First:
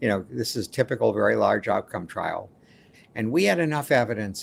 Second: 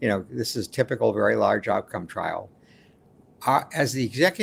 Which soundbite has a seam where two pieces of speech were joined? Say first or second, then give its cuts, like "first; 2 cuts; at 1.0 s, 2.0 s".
first; 1 cut; at 2.9 s